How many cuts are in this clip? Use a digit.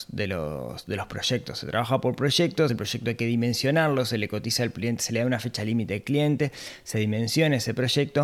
0